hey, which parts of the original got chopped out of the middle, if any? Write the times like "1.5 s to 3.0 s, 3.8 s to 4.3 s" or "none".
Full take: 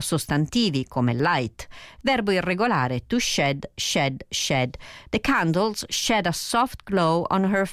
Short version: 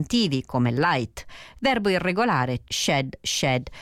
3.1 s to 3.7 s